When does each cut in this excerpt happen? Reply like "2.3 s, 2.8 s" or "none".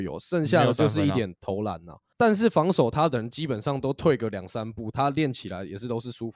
4.9 s